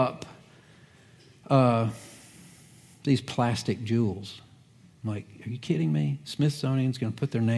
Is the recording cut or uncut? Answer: uncut